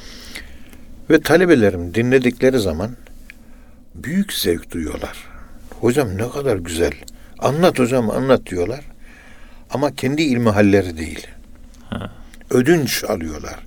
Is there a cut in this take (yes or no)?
no